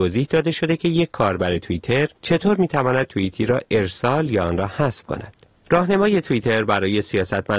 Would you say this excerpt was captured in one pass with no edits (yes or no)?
yes